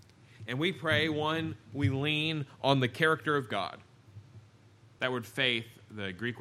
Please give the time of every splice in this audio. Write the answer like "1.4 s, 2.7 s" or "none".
5.0 s